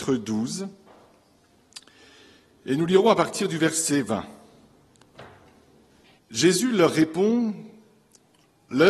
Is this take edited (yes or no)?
yes